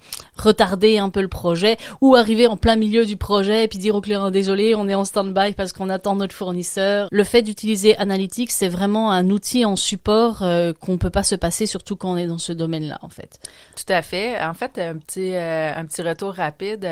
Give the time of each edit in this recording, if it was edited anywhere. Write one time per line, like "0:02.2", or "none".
0:07.1